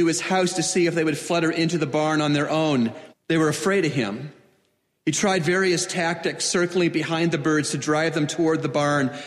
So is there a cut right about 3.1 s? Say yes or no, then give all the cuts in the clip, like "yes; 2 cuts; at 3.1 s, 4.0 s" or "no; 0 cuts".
yes; 1 cut; at 3.1 s